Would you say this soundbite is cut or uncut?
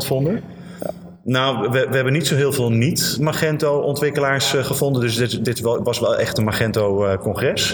uncut